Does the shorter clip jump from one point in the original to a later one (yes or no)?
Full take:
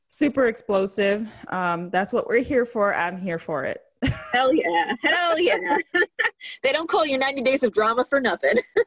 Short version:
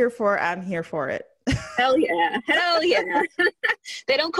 no